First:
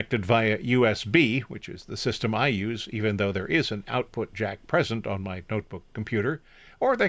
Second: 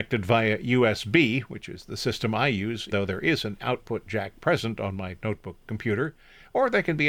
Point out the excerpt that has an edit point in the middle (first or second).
second